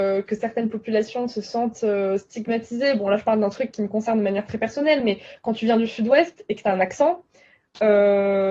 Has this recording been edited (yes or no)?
no